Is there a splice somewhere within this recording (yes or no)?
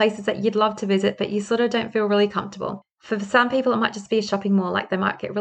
no